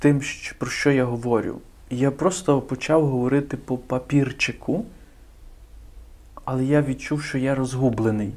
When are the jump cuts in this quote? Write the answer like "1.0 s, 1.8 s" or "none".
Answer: none